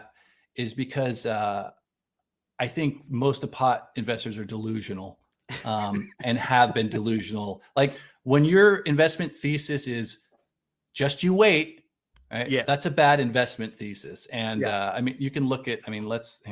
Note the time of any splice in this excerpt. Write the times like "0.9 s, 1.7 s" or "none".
none